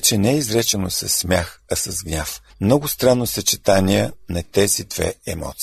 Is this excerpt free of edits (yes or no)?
no